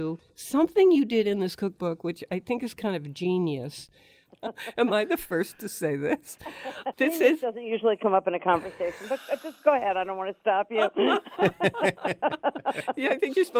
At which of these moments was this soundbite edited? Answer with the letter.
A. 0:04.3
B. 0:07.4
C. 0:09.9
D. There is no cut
A